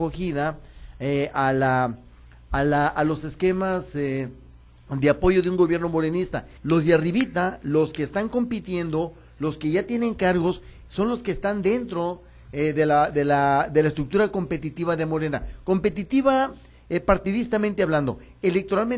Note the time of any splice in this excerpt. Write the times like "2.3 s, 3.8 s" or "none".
6.6 s